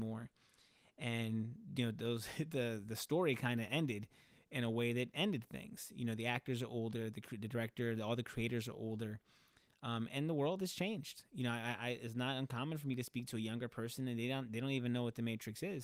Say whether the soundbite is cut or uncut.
uncut